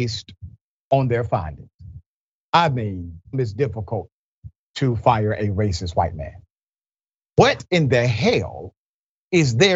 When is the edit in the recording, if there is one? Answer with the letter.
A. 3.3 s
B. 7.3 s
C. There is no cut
A